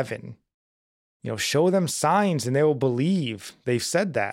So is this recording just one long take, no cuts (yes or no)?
no